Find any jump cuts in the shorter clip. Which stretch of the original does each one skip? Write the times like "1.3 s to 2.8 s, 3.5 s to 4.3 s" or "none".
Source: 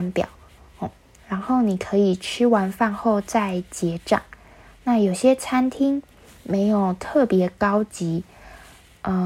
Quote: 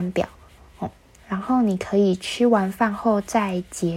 none